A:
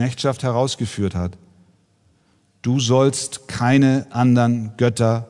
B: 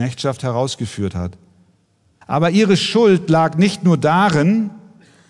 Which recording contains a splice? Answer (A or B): B